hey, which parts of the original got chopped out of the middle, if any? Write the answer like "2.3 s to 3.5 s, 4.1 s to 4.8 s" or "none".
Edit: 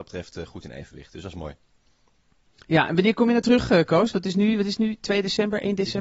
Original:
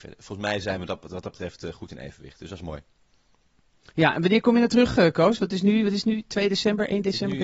none